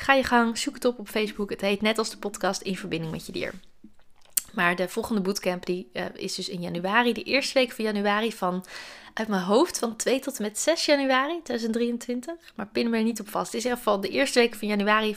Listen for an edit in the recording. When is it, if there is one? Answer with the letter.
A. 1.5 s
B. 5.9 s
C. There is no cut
C